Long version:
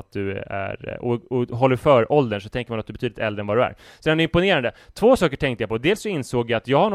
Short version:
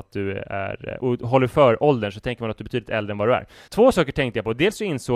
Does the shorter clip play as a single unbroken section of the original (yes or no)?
no